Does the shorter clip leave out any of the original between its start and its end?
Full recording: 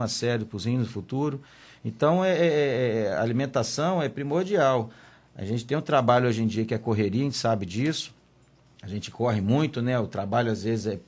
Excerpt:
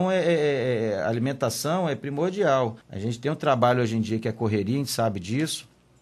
yes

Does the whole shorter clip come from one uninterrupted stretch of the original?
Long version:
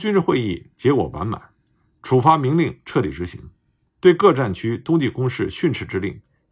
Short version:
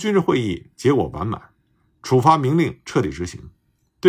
yes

